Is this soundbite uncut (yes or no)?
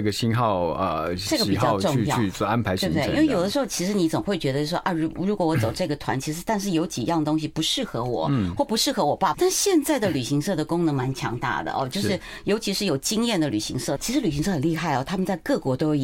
no